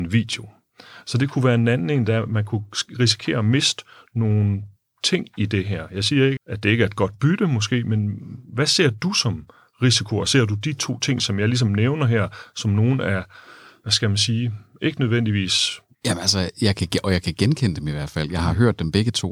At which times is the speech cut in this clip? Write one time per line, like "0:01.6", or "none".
0:06.4
0:15.9